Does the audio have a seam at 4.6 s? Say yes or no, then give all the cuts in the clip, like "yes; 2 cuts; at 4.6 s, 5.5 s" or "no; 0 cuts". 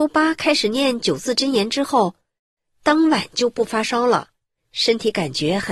yes; 1 cut; at 4.6 s